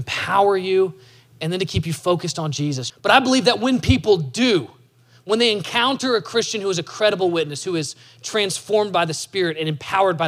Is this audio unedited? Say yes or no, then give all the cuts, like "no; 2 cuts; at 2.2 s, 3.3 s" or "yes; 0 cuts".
no; 1 cut; at 2.9 s